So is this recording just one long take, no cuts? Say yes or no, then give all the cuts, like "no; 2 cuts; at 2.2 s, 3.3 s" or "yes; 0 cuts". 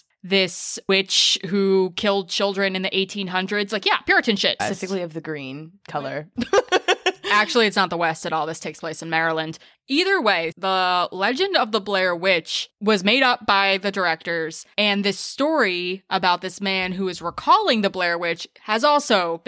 no; 2 cuts; at 4.6 s, 10.5 s